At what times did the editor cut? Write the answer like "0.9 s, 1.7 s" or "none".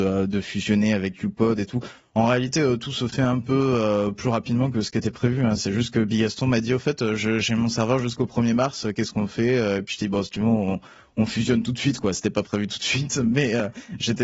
none